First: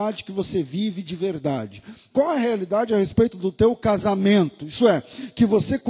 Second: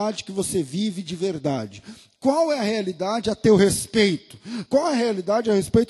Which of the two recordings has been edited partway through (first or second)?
first